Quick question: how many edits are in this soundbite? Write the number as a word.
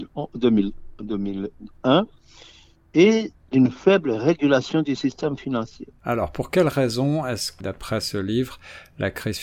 two